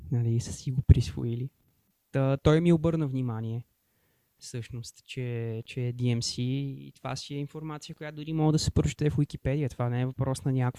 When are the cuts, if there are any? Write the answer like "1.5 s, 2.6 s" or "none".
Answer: none